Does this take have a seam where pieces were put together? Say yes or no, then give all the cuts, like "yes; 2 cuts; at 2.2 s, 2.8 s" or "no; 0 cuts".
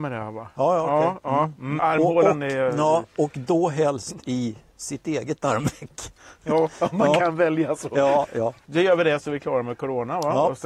yes; 1 cut; at 1.8 s